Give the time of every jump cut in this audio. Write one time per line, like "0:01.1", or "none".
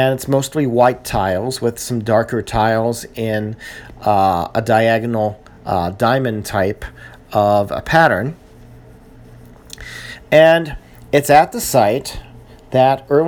none